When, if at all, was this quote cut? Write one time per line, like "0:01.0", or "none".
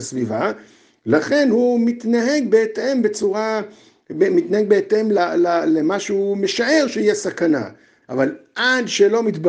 0:05.2
0:08.0